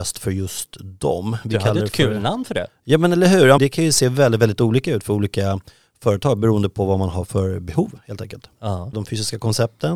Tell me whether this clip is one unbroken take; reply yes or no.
no